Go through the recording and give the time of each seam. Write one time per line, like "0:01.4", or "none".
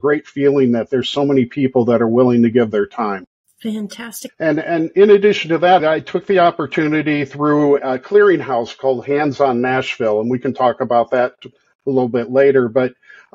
0:04.3
0:05.8
0:07.8